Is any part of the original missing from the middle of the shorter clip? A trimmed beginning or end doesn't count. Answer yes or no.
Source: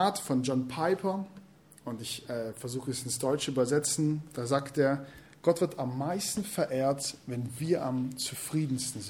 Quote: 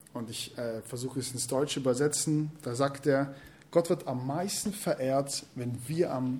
no